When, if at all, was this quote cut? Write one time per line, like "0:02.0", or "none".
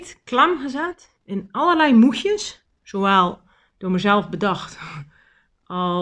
0:01.2